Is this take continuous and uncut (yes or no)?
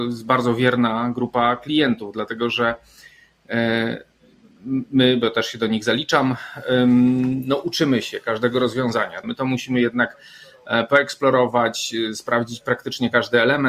no